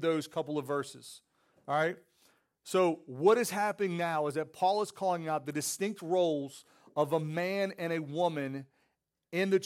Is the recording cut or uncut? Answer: uncut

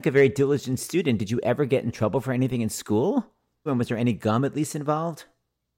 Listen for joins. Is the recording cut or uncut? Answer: cut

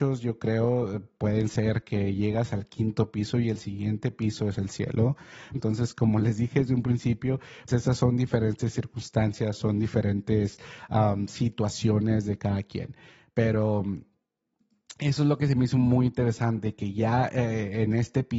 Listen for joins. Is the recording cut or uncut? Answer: cut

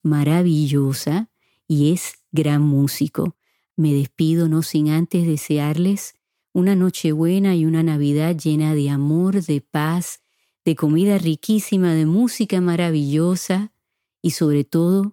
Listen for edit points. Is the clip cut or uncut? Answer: cut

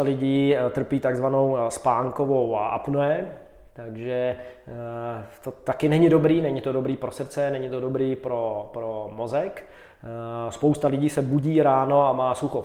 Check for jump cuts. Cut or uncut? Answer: uncut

